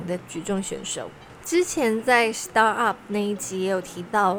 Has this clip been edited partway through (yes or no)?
yes